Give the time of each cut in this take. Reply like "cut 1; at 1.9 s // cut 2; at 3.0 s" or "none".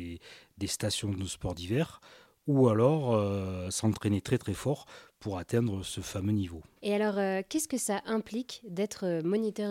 cut 1; at 6.8 s

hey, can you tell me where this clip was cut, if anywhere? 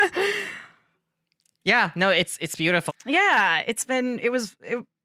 cut 1; at 2.9 s

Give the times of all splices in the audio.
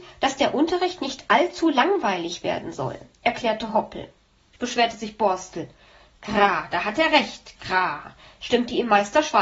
cut 1; at 4.6 s

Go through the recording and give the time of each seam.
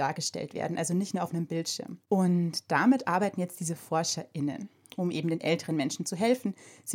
none

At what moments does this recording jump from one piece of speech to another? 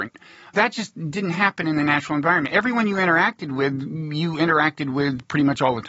none

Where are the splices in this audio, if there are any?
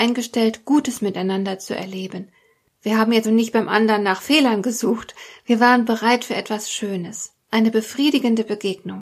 cut 1; at 3.2 s // cut 2; at 7.4 s

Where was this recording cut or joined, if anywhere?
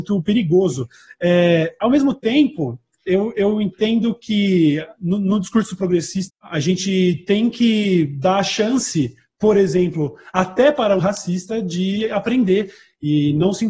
cut 1; at 6.3 s // cut 2; at 11.0 s

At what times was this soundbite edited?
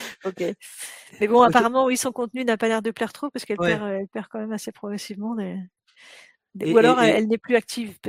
none

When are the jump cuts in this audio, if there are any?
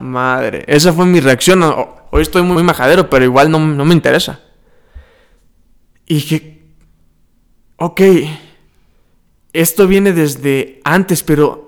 cut 1; at 2.6 s

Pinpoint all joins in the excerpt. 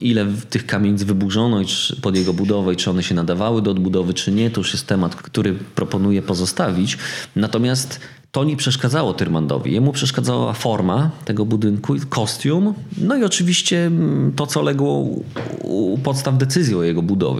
cut 1; at 5.2 s

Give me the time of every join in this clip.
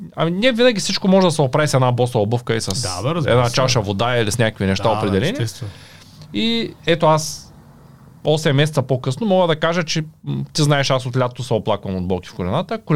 none

